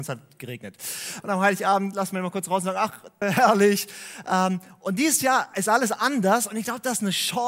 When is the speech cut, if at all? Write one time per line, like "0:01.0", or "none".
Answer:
0:01.2
0:03.2